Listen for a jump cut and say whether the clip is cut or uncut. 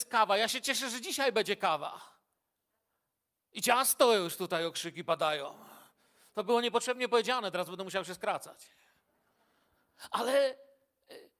uncut